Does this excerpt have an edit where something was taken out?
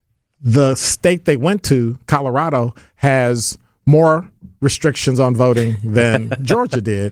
no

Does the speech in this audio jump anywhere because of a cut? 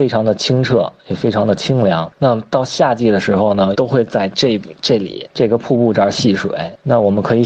yes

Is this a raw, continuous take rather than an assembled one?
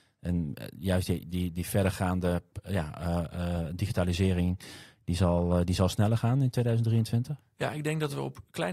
yes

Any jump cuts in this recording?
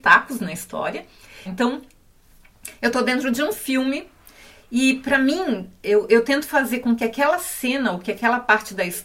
yes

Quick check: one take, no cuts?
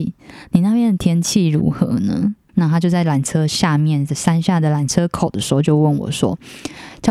no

